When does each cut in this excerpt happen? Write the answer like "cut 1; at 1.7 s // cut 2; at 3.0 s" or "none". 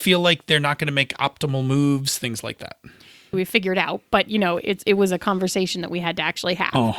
cut 1; at 3.3 s